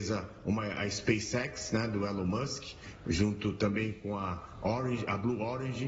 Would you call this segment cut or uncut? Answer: uncut